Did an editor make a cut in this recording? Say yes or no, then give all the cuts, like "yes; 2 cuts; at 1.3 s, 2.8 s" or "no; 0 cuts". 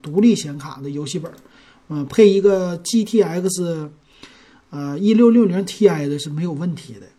no; 0 cuts